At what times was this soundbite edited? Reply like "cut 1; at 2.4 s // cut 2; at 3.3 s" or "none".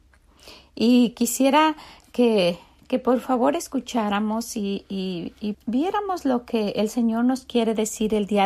cut 1; at 5.5 s